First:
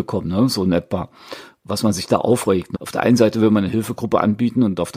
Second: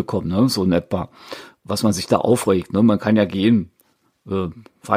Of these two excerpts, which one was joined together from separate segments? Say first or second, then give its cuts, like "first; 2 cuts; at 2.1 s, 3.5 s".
first; 1 cut; at 2.7 s